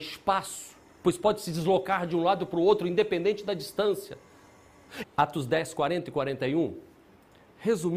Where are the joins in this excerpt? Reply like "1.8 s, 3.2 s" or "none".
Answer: 5.0 s